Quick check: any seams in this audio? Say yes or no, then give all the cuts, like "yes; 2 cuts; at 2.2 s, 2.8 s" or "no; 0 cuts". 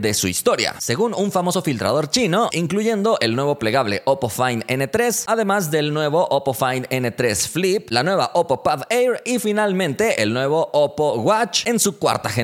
yes; 1 cut; at 2.5 s